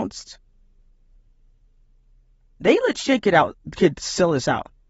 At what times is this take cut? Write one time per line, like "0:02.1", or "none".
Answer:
none